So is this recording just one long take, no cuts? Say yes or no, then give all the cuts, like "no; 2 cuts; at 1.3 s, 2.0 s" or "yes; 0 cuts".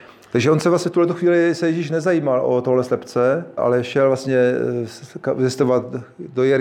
no; 1 cut; at 3.6 s